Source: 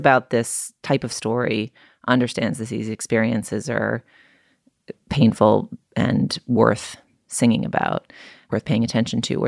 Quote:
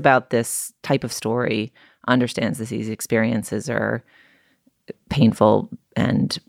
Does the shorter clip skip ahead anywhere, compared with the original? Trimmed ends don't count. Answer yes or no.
no